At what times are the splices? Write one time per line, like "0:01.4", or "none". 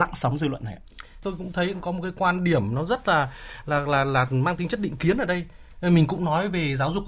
0:01.2